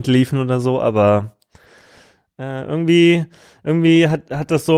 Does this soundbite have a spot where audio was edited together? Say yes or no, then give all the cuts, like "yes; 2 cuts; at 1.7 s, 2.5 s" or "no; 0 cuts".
no; 0 cuts